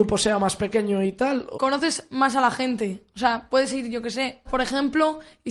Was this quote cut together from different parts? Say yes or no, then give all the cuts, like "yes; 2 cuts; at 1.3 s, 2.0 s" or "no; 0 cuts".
yes; 2 cuts; at 1.5 s, 4.4 s